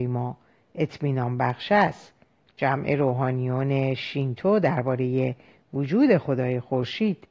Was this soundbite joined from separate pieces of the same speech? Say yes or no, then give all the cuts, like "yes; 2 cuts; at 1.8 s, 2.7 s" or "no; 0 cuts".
no; 0 cuts